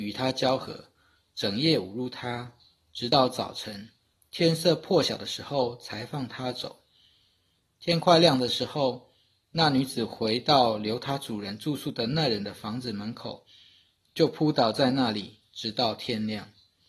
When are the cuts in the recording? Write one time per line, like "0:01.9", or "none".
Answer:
none